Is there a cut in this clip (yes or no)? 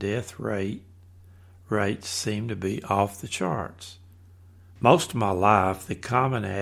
yes